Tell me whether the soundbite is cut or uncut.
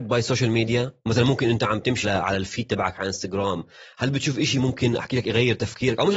cut